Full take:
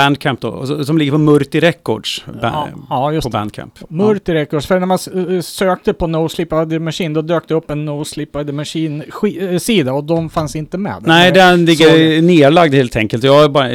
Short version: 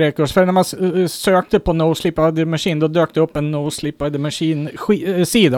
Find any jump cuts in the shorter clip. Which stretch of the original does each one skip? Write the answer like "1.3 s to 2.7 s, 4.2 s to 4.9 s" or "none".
none